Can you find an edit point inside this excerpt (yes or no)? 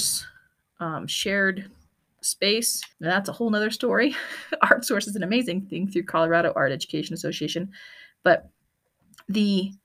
yes